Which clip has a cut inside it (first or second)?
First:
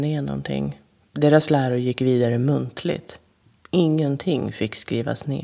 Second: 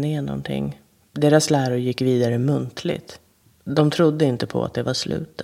second